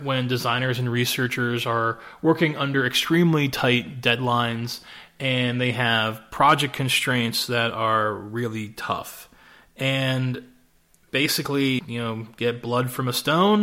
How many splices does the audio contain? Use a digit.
1